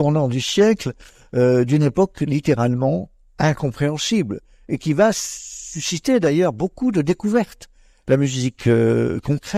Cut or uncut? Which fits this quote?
uncut